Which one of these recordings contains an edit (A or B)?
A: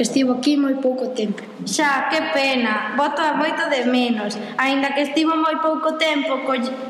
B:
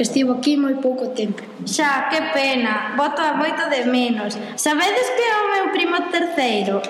B